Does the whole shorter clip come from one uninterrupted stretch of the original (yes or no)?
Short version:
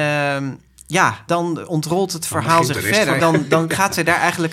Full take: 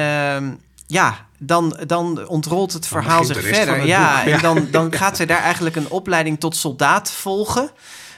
no